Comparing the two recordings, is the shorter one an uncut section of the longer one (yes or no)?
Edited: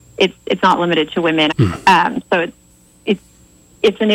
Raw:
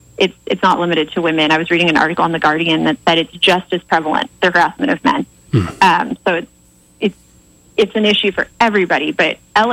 no